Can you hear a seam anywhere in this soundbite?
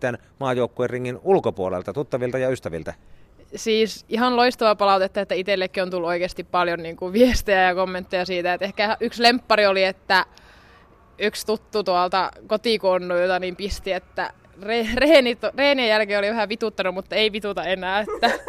no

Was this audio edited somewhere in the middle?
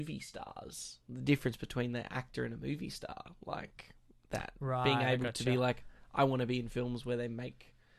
no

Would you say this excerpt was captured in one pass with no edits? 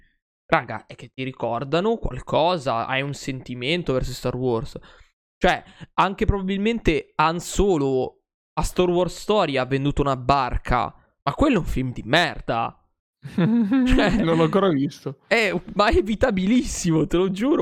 yes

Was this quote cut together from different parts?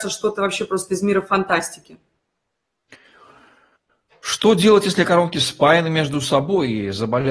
no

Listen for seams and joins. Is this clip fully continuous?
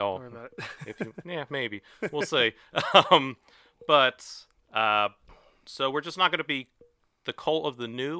yes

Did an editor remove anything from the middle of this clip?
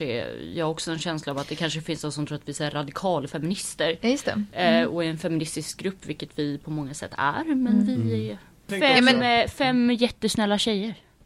no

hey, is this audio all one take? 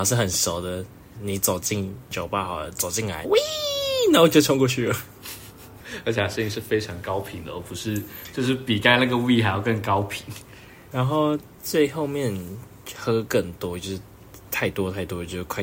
no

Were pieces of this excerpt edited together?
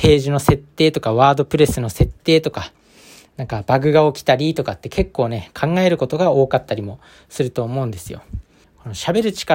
yes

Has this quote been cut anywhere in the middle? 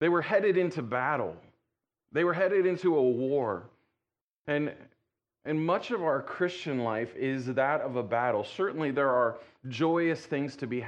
no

